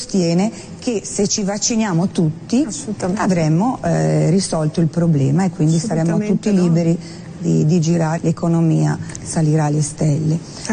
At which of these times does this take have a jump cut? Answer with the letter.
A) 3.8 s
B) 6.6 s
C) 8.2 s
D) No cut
C